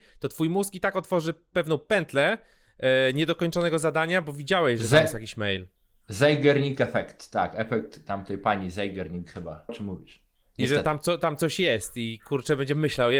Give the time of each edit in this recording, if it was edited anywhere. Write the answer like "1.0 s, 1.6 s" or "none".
9.7 s